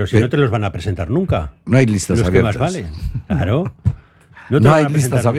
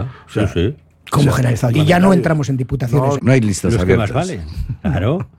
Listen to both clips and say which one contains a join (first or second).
second